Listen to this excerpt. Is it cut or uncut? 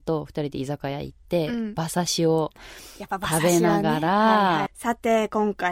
cut